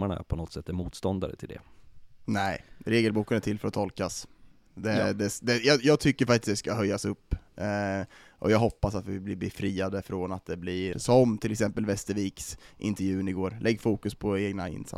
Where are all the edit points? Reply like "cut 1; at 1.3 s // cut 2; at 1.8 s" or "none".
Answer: cut 1; at 10.9 s